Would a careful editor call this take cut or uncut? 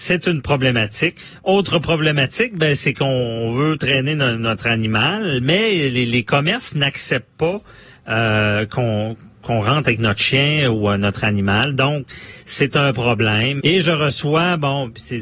cut